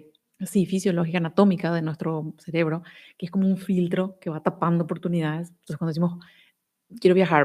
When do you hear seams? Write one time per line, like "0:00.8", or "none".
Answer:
none